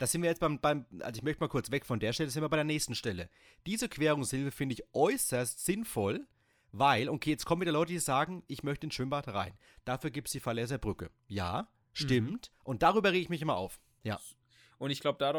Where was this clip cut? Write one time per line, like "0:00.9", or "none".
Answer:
0:12.5
0:14.0